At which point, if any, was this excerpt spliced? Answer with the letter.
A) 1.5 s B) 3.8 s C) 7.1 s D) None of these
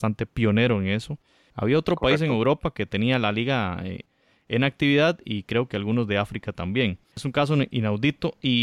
A